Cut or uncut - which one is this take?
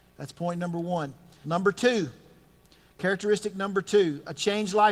cut